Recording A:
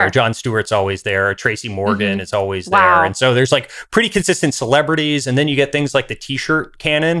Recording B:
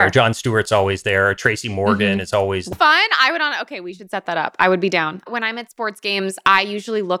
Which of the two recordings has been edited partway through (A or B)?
B